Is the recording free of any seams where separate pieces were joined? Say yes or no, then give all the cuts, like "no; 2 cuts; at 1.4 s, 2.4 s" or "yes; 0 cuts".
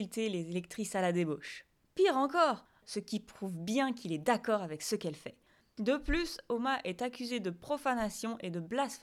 no; 1 cut; at 2.8 s